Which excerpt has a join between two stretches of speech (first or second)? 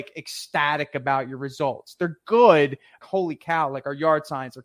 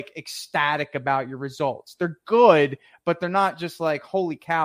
first